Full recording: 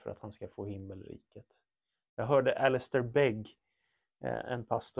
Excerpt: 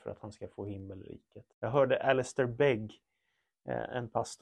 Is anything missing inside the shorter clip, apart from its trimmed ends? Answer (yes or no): yes